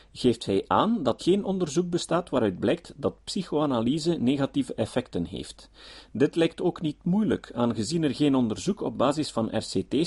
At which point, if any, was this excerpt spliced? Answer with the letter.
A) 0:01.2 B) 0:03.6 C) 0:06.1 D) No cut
A